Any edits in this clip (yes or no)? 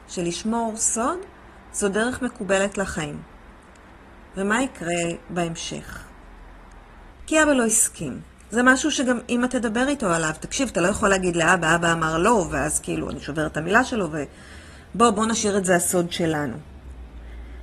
yes